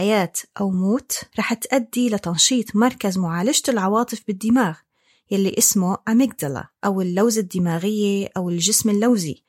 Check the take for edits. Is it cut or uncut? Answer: cut